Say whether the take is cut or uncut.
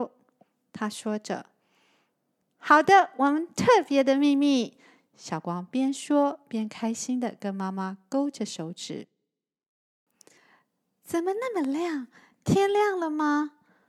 uncut